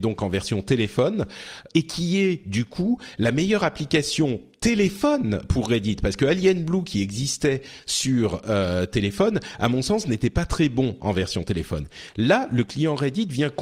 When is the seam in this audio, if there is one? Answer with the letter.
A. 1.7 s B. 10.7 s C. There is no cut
A